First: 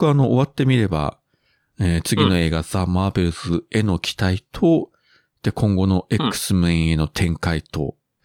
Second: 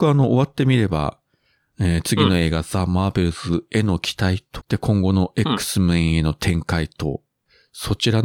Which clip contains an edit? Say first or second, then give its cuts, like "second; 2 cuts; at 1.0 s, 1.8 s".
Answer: second; 1 cut; at 4.6 s